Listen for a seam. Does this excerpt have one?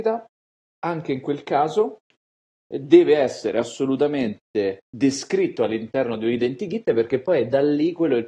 yes; 1 cut; at 4.8 s

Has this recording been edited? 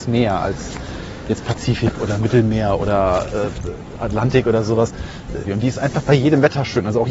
yes; 1 cut; at 5.4 s

